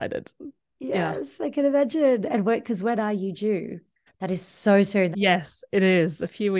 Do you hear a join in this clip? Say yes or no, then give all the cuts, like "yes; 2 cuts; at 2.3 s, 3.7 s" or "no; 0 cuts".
yes; 2 cuts; at 4.1 s, 5.1 s